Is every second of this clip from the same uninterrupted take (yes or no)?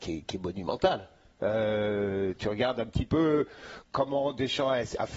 yes